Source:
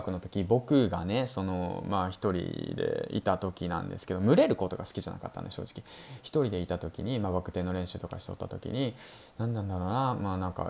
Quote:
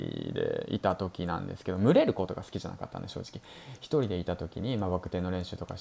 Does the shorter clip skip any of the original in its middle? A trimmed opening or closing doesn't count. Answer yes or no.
no